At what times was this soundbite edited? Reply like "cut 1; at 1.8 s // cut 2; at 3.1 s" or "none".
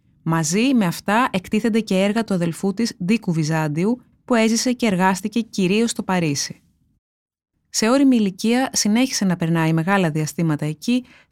cut 1; at 4.1 s // cut 2; at 7.5 s